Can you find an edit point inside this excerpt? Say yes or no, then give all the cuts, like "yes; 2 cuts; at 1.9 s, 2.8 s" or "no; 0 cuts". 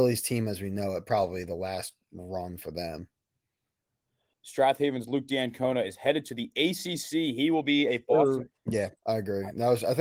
yes; 2 cuts; at 4.3 s, 8.5 s